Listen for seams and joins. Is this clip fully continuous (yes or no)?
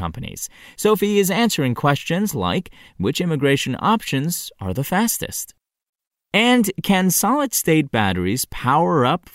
yes